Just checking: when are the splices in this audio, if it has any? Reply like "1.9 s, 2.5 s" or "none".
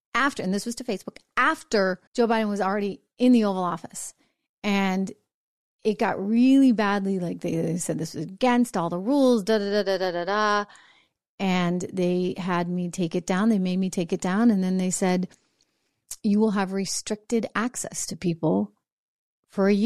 2.1 s